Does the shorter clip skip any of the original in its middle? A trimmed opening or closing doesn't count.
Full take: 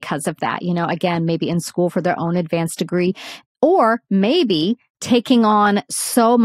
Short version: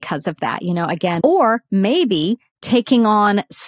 yes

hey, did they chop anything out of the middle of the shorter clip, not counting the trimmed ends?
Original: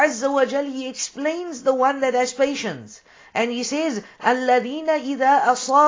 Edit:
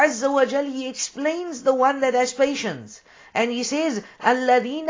no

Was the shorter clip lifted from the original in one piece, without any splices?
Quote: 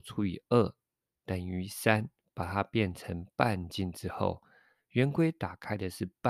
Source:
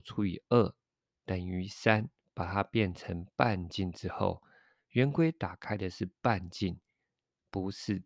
yes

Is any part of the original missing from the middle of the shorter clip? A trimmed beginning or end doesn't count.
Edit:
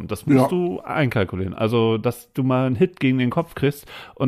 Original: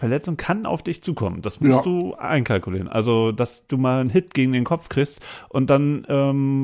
no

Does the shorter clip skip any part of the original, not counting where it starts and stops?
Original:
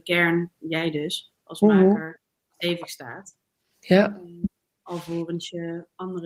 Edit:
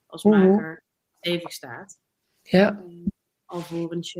no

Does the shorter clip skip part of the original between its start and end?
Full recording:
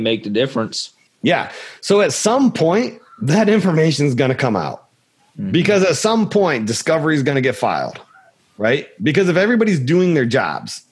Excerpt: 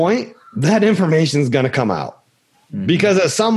no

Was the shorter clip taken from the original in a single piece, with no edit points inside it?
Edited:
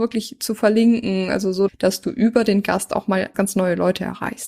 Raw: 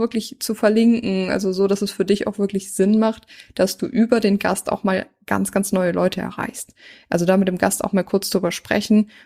no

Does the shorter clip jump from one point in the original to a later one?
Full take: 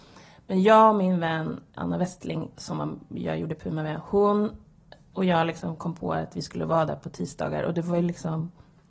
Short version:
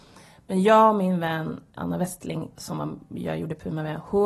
no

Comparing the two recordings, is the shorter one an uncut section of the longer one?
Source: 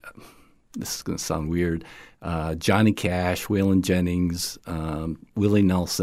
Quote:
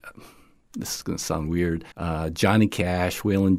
no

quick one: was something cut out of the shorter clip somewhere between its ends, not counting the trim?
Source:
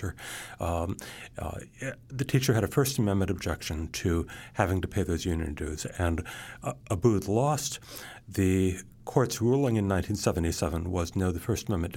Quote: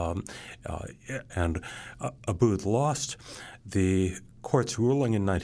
yes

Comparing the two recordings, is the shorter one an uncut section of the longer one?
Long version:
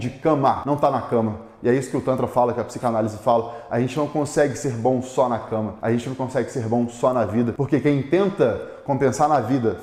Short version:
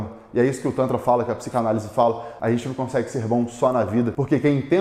no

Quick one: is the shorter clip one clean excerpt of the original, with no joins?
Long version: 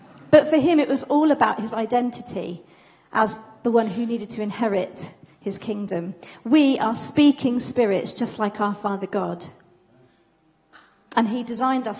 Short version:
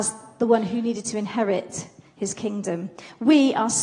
yes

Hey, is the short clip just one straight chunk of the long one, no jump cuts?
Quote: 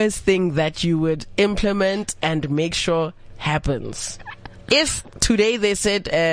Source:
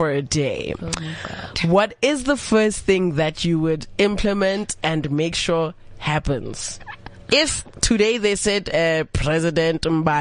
yes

